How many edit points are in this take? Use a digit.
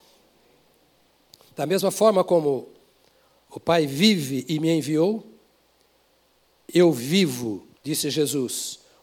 1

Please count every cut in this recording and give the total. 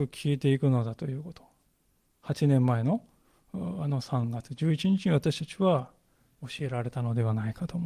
0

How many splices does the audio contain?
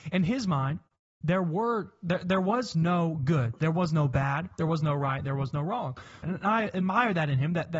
1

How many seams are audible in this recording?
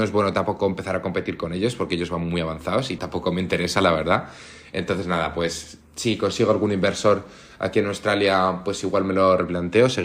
1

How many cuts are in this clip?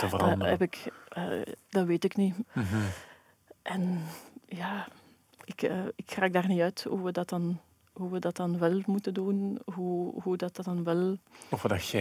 1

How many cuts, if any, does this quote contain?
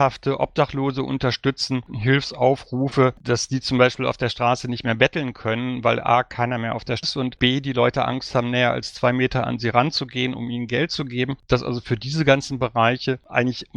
1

